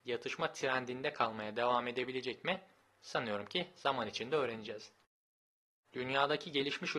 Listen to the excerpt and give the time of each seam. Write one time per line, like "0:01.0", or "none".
0:05.8